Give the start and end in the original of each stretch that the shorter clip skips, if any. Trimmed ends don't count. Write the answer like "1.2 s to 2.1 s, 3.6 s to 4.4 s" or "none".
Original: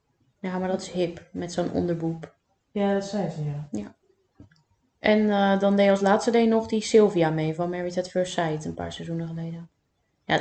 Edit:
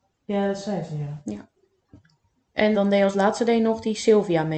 5.2 s to 5.6 s

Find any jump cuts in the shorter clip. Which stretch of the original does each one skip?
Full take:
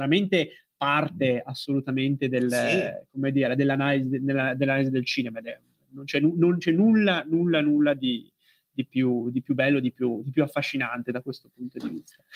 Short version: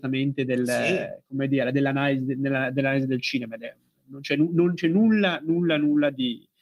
none

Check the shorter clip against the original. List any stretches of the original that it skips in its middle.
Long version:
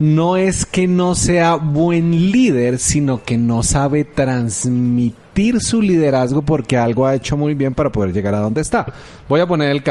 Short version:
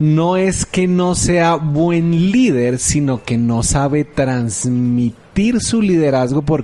none

